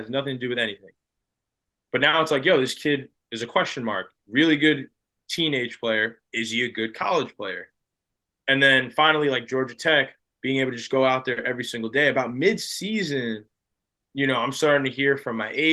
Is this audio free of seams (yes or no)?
yes